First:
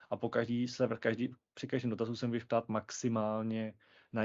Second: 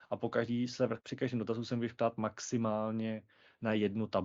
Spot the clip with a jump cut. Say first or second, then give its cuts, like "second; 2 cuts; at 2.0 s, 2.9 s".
second; 1 cut; at 1.0 s